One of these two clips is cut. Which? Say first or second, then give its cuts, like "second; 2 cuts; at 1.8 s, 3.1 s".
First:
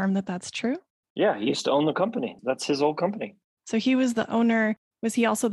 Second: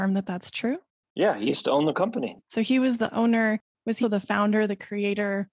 second; 2 cuts; at 2.4 s, 4.0 s